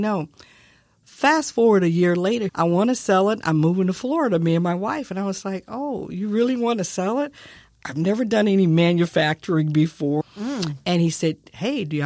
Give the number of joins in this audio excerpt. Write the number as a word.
two